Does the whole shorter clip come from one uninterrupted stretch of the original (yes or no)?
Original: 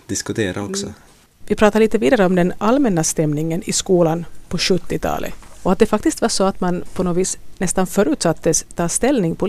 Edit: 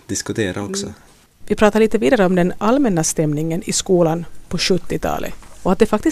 yes